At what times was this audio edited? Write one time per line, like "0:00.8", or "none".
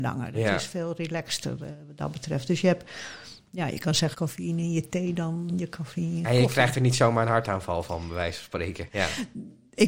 0:04.1
0:08.9